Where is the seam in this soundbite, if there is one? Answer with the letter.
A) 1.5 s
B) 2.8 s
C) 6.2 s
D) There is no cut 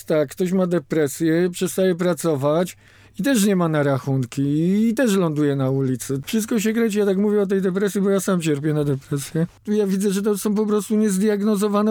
D